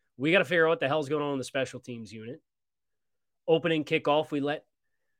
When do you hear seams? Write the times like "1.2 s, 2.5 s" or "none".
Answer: none